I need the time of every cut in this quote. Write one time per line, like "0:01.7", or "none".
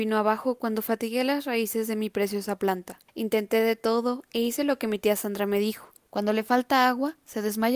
0:03.1
0:06.1